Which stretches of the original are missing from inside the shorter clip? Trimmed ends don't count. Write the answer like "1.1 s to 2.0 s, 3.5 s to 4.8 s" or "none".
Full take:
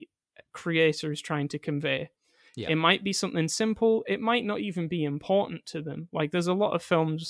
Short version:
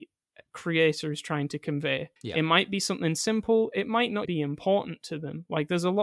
2.2 s to 2.5 s, 4.6 s to 4.9 s